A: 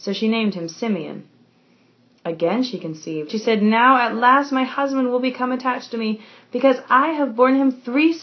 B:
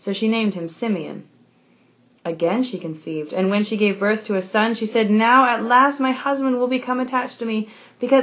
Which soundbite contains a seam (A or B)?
A